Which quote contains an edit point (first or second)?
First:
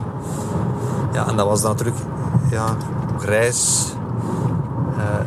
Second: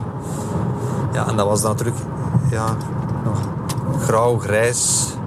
first